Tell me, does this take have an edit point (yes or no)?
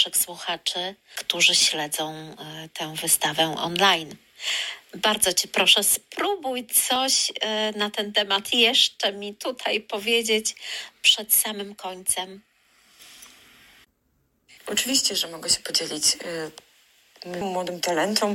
yes